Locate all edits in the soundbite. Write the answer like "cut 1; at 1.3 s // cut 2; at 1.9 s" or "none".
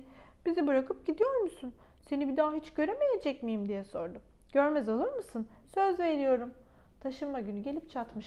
cut 1; at 5.6 s